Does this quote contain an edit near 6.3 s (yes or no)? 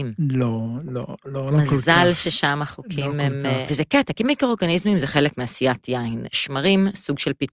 no